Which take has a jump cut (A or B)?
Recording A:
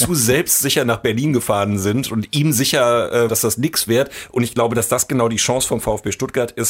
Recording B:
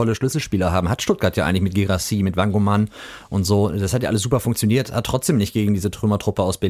A